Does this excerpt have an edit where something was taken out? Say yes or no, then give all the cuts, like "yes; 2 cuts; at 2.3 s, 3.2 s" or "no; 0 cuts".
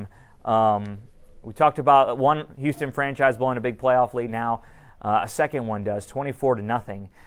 no; 0 cuts